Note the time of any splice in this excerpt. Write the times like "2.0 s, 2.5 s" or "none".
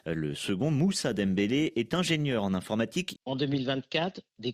3.2 s